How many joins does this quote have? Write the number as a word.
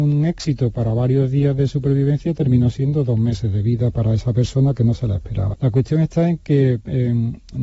one